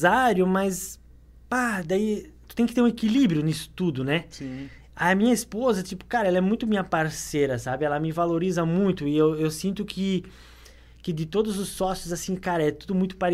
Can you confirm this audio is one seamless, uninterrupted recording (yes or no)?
yes